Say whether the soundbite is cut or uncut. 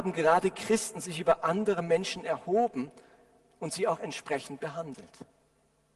uncut